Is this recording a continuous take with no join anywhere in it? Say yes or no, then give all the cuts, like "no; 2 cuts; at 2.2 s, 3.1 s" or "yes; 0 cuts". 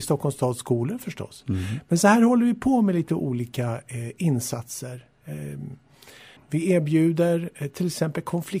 no; 1 cut; at 6.4 s